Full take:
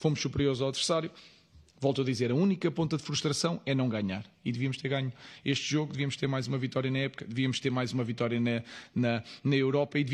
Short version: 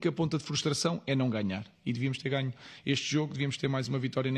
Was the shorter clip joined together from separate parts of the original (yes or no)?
no